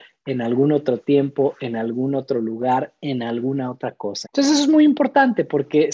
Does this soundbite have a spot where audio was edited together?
yes; 1 cut; at 4.2 s

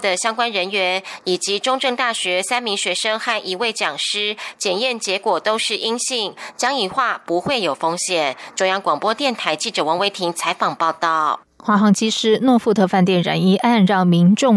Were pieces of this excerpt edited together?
yes; 1 cut; at 11.5 s

